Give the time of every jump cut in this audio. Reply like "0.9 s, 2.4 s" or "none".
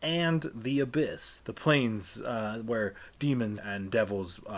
1.4 s, 3.6 s